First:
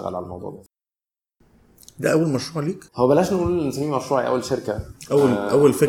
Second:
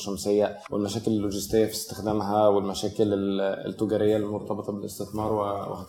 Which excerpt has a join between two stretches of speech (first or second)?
first